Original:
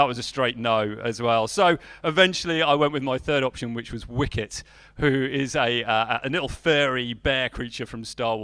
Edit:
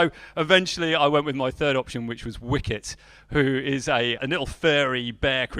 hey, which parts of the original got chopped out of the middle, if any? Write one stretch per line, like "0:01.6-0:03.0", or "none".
0:05.8-0:06.2